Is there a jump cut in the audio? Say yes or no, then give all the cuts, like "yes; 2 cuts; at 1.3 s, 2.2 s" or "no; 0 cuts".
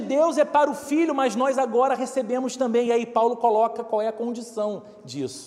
no; 0 cuts